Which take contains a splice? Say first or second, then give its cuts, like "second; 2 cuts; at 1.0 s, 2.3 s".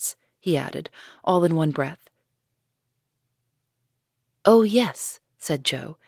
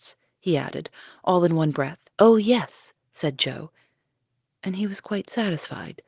second; 1 cut; at 2.1 s